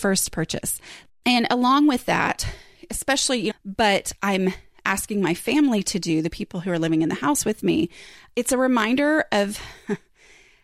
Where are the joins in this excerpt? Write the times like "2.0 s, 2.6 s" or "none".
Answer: 1.1 s, 3.5 s